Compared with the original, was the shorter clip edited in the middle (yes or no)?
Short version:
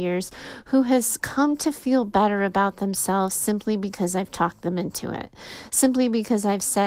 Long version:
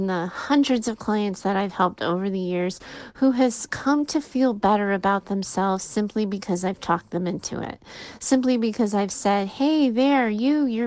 no